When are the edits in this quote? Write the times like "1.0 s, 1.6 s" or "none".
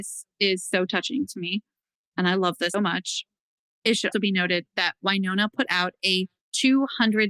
2.7 s, 4.1 s